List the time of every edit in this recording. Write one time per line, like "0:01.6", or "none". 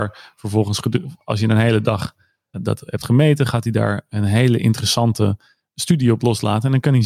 0:02.5
0:05.7